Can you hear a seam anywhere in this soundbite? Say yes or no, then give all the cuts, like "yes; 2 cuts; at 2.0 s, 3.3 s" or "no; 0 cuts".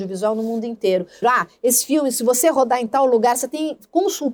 yes; 1 cut; at 1.2 s